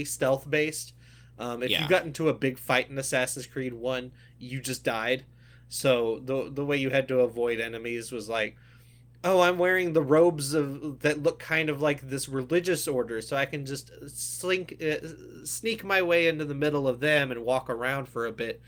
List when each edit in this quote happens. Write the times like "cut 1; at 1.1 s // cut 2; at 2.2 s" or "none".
none